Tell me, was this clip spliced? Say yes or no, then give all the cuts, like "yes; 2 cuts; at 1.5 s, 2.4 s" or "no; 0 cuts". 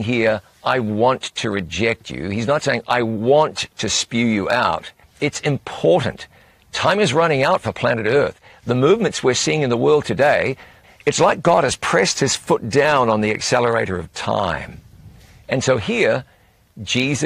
yes; 2 cuts; at 5.0 s, 10.8 s